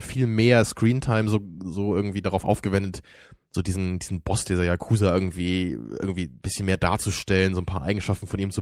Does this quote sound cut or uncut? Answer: uncut